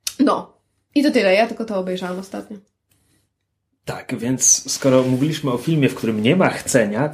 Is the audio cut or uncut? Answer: uncut